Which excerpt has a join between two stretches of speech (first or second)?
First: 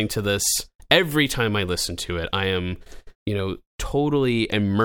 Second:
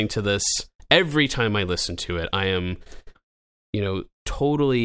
first